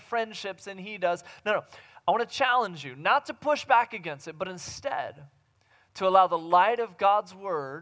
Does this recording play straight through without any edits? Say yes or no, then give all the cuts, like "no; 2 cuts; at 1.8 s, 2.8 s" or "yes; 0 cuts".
yes; 0 cuts